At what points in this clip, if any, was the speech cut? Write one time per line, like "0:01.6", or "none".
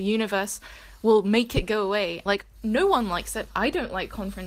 0:02.3